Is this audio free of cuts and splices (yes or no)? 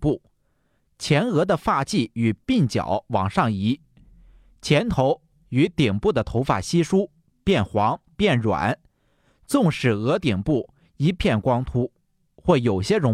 yes